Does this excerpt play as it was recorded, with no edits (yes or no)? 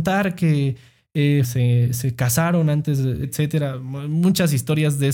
no